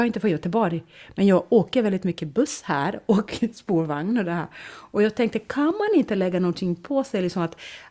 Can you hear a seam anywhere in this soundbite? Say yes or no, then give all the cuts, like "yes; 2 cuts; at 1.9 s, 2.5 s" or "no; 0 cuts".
no; 0 cuts